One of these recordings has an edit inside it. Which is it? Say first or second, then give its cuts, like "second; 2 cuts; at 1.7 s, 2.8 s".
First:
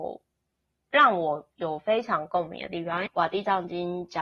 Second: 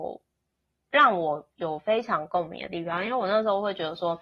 first; 1 cut; at 3.1 s